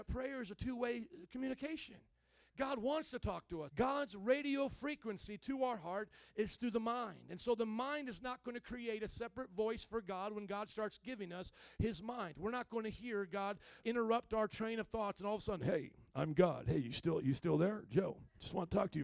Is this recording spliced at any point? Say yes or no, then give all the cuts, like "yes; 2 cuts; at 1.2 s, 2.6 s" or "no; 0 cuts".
yes; 2 cuts; at 3.7 s, 13.8 s